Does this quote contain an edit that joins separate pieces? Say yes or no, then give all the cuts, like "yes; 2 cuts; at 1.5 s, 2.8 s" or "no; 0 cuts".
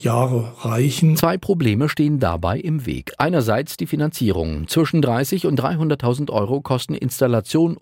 no; 0 cuts